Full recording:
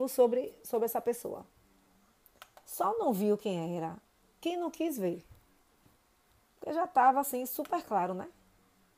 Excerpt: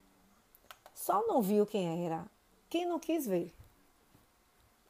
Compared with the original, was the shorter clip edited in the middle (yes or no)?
no